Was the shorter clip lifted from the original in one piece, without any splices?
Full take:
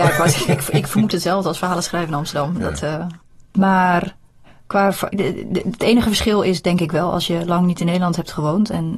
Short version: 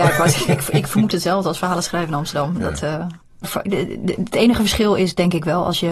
no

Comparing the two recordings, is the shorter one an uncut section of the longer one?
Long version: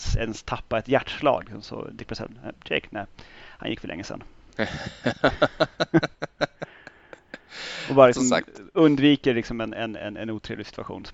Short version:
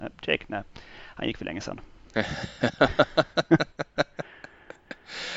yes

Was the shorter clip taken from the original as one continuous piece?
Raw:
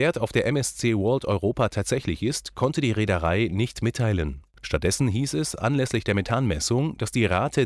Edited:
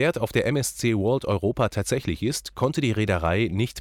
yes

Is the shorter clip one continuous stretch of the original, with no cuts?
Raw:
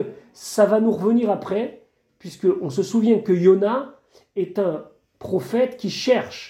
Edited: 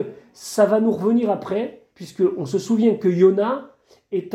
no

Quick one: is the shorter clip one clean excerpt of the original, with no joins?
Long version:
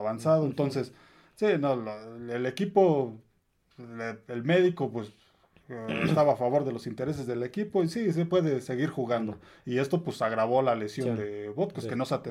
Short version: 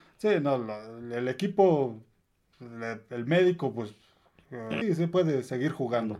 no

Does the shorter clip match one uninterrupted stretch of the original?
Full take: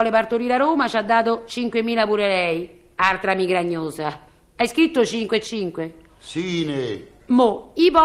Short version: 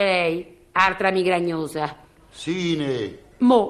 no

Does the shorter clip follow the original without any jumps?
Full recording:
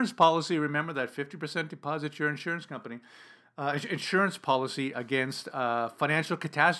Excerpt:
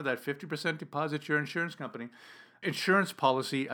no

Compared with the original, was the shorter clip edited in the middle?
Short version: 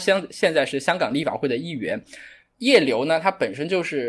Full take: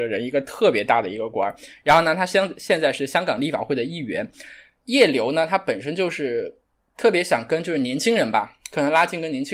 no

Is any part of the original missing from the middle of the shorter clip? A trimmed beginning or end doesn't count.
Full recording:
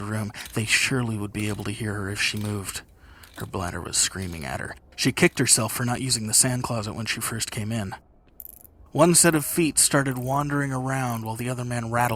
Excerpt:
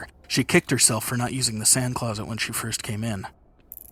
no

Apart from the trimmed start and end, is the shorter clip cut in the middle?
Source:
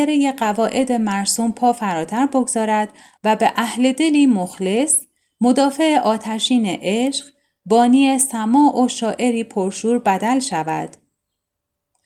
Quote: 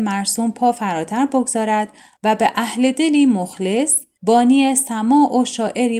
yes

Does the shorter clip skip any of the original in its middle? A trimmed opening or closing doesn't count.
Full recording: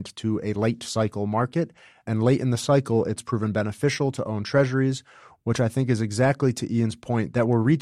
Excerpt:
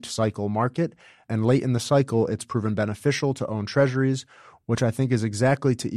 no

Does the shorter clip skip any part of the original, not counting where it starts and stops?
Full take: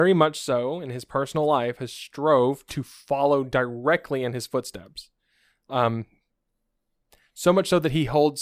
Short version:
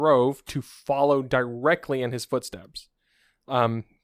no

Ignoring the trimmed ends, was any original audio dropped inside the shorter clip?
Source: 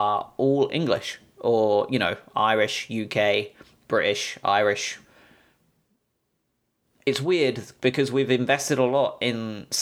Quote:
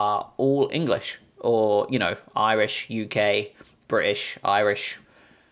no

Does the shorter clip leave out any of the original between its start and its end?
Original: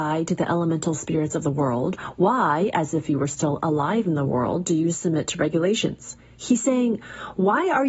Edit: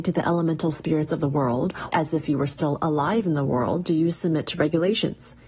yes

